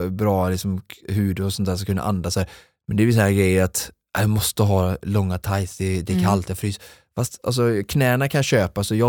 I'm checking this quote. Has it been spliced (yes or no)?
no